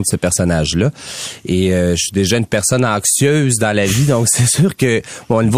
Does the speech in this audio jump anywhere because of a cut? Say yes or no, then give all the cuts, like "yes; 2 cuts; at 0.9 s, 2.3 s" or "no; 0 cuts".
no; 0 cuts